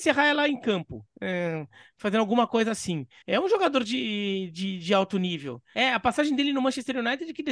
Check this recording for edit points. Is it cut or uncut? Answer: cut